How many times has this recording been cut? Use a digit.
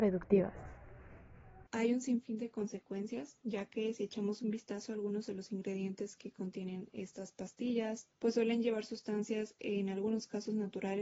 2